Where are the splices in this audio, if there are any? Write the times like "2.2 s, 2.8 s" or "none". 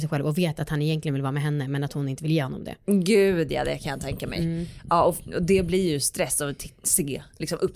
none